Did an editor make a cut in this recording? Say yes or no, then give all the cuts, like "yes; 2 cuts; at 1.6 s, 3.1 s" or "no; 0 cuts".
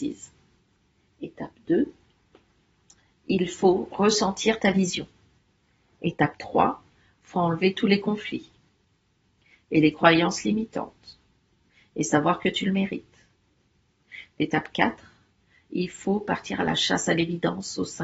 no; 0 cuts